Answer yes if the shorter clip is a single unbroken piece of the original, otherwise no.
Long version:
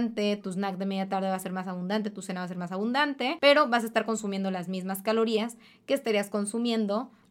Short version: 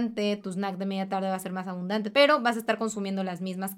no